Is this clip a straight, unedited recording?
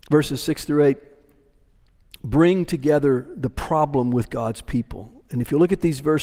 yes; 0 cuts

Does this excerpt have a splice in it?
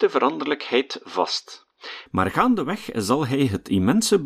yes; 1 cut; at 2.1 s

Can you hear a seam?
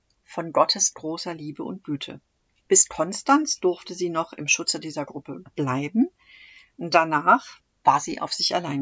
no; 0 cuts

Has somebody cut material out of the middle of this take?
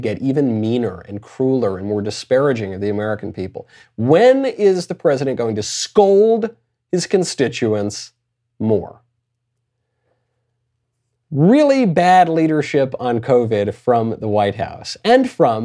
no; 0 cuts

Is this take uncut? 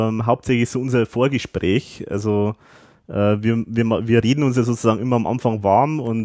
yes; 0 cuts

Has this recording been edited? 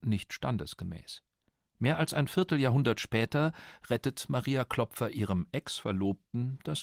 no; 0 cuts

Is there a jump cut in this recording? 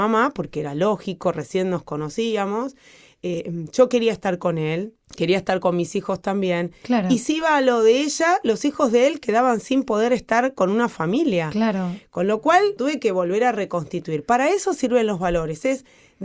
yes; 2 cuts; at 5.0 s, 12.8 s

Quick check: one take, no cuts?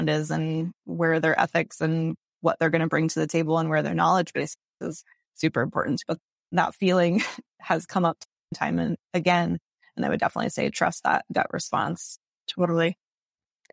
yes; 0 cuts

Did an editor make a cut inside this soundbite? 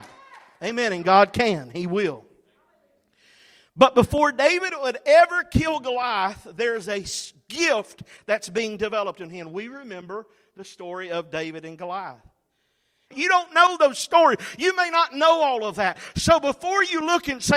yes; 1 cut; at 13.1 s

